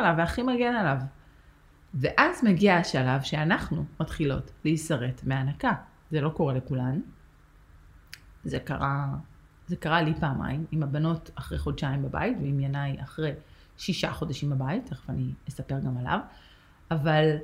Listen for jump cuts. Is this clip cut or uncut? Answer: uncut